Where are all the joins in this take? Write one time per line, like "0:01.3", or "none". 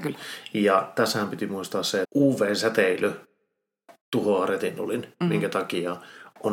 0:02.0
0:04.0